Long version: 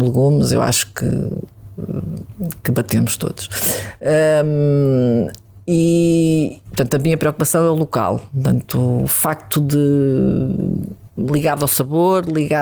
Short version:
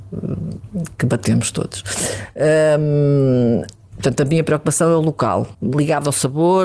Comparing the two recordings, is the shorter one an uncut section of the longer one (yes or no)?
no